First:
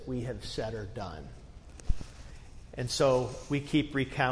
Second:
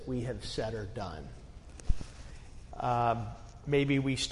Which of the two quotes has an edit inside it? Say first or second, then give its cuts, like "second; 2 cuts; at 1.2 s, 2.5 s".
second; 1 cut; at 2.7 s